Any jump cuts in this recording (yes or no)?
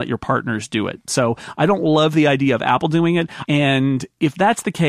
yes